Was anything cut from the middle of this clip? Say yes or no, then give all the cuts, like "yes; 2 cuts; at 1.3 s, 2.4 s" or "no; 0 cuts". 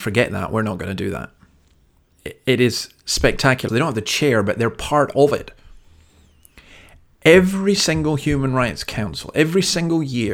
yes; 1 cut; at 3.7 s